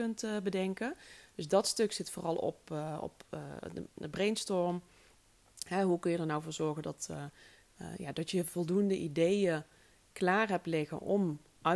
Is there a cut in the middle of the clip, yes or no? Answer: no